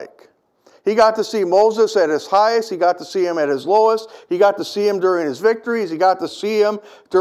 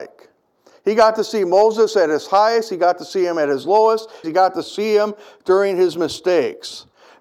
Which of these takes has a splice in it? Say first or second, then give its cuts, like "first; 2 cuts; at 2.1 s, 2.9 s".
second; 1 cut; at 4.2 s